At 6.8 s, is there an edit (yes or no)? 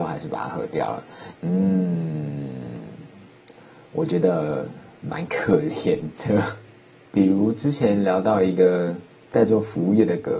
no